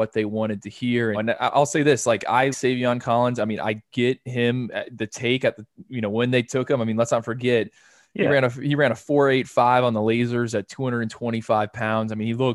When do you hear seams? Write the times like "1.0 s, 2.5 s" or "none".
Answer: 1.1 s, 2.5 s